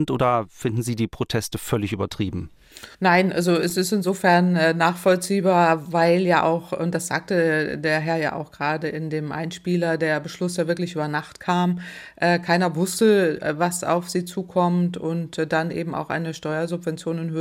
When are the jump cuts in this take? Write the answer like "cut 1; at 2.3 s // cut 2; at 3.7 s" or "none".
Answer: cut 1; at 2.9 s

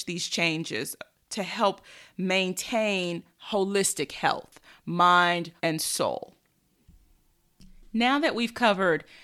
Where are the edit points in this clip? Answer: cut 1; at 5.6 s

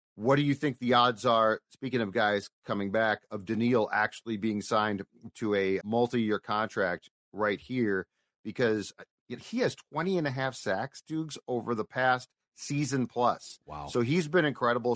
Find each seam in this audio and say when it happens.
cut 1; at 5.8 s

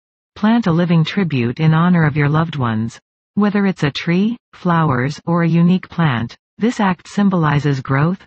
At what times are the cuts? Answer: none

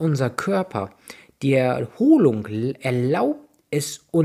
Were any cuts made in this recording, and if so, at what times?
none

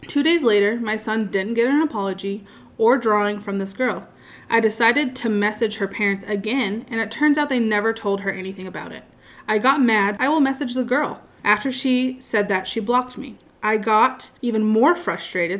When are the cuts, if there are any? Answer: cut 1; at 10.2 s // cut 2; at 11.4 s

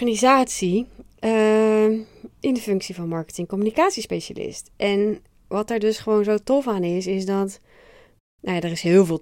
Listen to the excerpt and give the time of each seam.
none

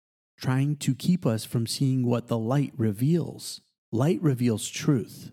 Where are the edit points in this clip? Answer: none

